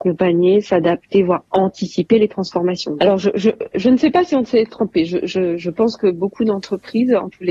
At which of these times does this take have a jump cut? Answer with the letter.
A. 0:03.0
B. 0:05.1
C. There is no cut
A